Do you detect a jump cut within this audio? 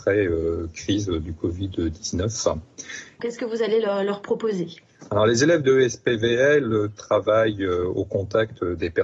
yes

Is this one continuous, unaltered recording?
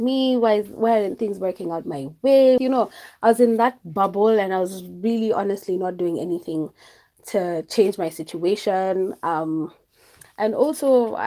no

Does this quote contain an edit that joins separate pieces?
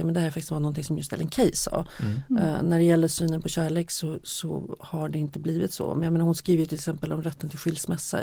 no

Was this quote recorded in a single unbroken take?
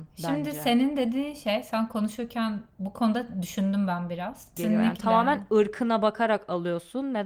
no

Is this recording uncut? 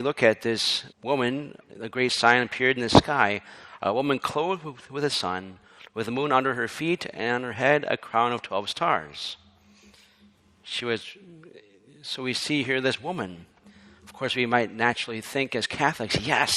no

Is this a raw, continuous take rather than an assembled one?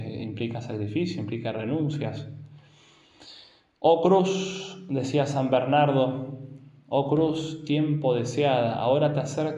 yes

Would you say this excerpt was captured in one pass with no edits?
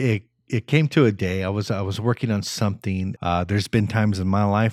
no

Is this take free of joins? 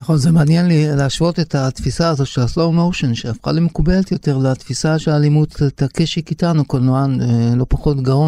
yes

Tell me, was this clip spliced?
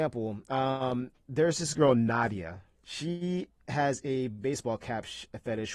yes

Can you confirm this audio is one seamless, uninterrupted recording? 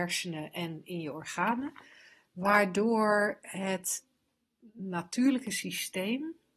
yes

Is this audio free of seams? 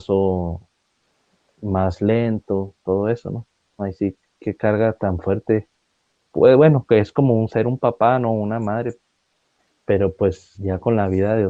no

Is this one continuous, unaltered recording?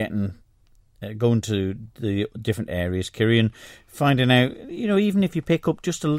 yes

